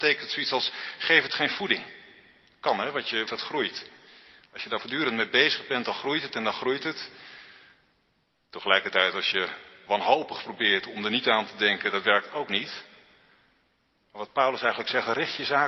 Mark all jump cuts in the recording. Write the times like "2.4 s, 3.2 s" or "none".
3.3 s